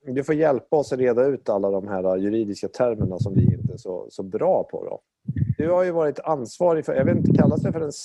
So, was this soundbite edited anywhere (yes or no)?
yes